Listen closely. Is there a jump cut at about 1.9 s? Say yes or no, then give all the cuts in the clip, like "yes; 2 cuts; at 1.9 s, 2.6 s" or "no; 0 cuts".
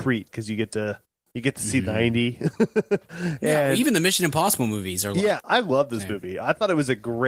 yes; 2 cuts; at 1.9 s, 5.4 s